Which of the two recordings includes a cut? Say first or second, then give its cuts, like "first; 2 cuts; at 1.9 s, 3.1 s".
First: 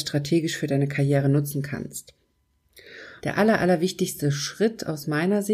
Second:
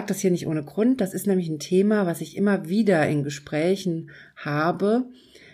first; 1 cut; at 3.2 s